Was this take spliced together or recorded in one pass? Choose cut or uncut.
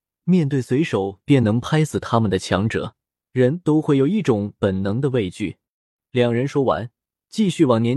cut